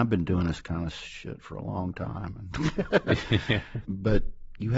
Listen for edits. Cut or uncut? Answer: cut